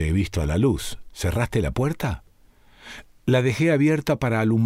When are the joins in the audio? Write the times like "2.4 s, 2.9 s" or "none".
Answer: none

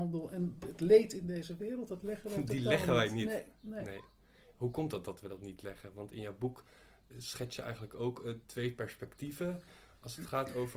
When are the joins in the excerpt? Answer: none

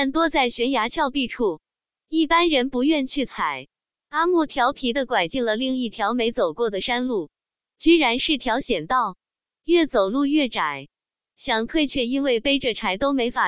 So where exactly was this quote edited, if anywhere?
3.9 s

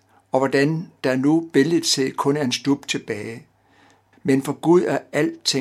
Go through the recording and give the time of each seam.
4.1 s

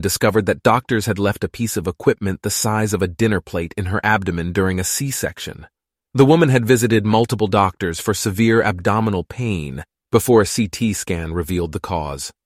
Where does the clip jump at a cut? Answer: none

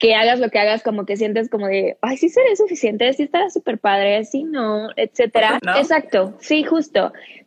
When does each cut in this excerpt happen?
5.6 s

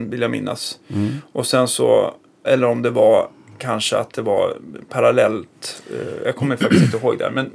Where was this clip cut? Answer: 2.4 s

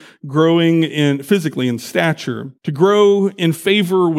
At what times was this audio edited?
2.6 s

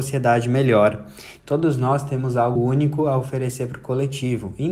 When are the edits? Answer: 1.4 s, 2.6 s

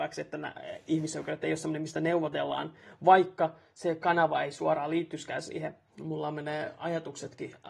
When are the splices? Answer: 5.9 s

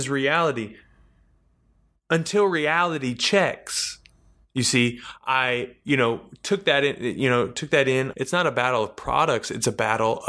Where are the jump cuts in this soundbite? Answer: 8.1 s

